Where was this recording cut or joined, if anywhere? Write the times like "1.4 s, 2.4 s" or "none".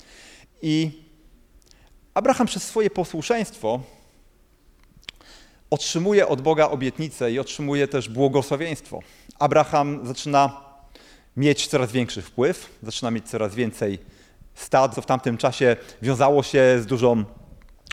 14.9 s